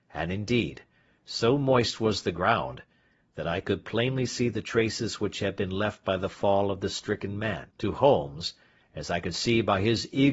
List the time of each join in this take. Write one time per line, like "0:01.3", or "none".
0:07.7